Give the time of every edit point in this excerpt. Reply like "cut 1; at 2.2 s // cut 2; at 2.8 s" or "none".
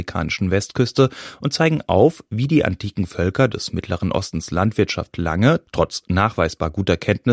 none